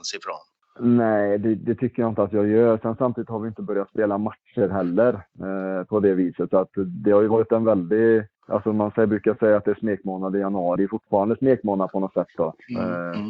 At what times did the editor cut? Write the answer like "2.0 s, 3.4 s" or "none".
8.3 s, 10.8 s